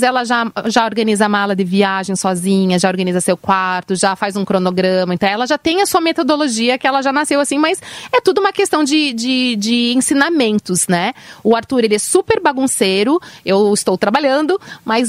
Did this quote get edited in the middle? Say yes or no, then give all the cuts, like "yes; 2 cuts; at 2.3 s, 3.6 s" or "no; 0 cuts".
no; 0 cuts